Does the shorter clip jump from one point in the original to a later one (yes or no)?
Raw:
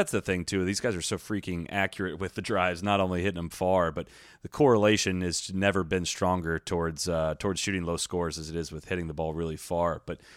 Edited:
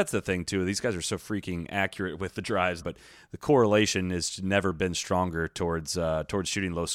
yes